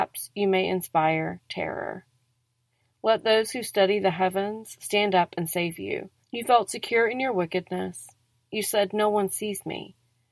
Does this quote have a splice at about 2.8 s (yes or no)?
yes